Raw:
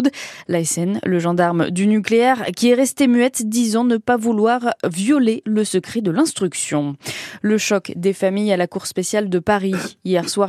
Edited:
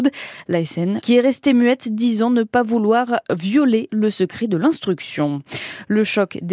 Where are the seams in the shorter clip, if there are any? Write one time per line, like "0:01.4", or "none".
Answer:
0:01.0